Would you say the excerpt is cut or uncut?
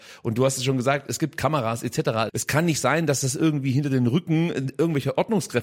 cut